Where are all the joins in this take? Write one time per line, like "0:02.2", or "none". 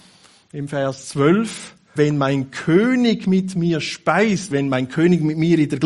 0:02.0
0:04.5